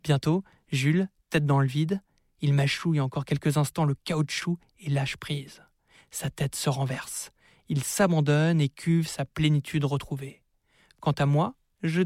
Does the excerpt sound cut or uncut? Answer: uncut